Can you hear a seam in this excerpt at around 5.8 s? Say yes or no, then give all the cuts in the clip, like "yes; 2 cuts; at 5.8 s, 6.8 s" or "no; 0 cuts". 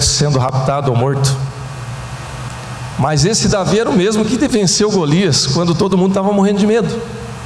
no; 1 cut; at 2.9 s